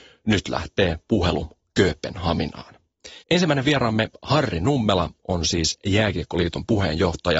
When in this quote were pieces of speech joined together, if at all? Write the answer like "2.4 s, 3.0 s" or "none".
3.2 s